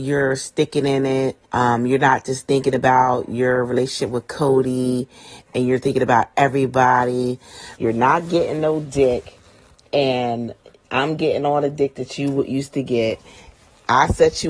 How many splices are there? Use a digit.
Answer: 2